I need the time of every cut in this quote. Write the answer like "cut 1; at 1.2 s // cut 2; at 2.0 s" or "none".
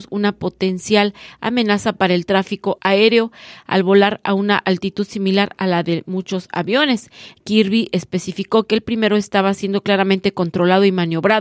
cut 1; at 2.8 s // cut 2; at 7.4 s